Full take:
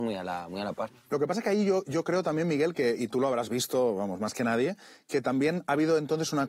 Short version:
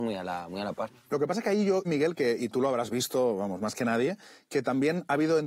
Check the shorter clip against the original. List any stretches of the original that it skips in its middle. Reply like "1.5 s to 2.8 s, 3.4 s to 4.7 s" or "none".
1.8 s to 2.4 s